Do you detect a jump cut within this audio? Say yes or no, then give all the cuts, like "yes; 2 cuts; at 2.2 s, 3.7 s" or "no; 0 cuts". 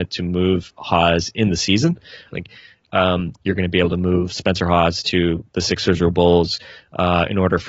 yes; 2 cuts; at 2.3 s, 3.4 s